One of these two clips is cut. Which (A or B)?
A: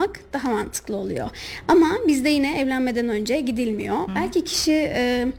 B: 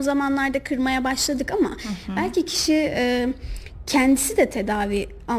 A